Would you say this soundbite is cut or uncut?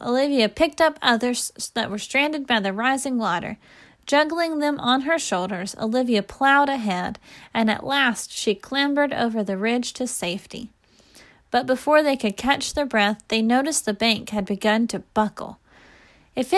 uncut